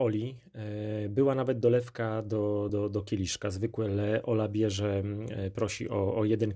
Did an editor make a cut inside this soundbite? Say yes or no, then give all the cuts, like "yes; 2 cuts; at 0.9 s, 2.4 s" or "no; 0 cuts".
no; 0 cuts